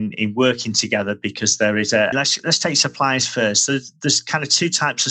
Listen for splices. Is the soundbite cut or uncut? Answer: cut